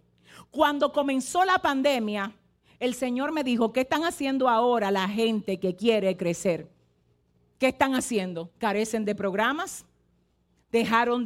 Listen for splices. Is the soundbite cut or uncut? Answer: uncut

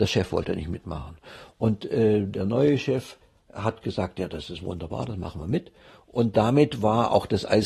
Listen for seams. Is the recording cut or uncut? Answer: uncut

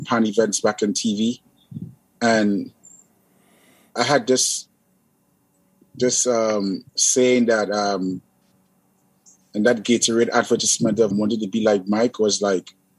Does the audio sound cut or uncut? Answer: cut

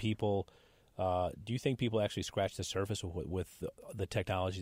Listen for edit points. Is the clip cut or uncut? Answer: uncut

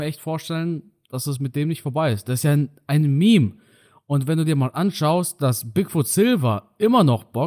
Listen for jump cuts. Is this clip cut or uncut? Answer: uncut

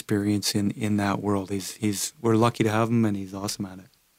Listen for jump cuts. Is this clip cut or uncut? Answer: uncut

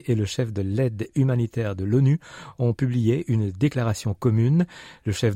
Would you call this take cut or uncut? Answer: uncut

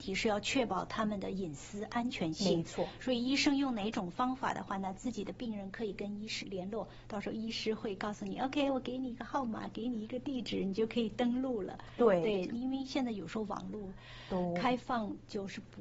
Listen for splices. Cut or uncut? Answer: cut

